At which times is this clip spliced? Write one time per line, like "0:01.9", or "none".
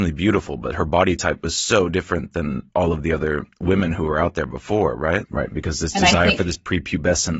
0:05.2